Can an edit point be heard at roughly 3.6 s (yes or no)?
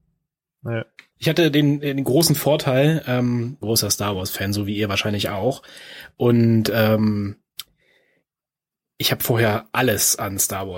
yes